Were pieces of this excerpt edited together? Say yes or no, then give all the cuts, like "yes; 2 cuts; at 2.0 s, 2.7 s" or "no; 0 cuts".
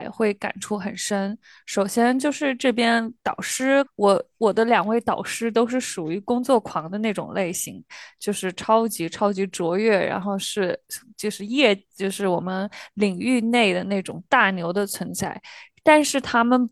yes; 1 cut; at 3.9 s